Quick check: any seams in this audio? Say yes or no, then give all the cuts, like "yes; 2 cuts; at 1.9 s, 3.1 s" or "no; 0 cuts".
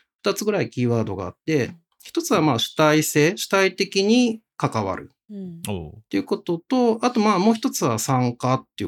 no; 0 cuts